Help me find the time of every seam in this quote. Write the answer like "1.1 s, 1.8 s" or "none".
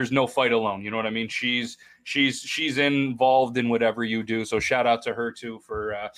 none